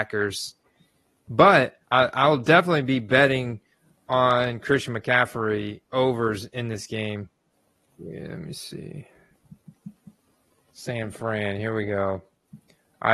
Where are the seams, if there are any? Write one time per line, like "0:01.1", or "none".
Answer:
0:01.8
0:07.9